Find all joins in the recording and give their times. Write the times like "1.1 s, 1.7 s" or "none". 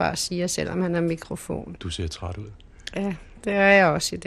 1.8 s